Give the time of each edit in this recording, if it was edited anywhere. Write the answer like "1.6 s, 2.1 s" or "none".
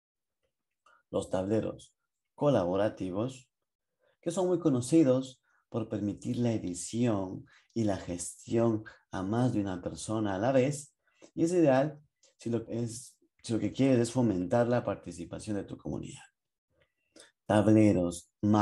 12.7 s